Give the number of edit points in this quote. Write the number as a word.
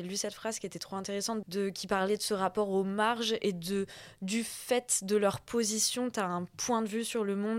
one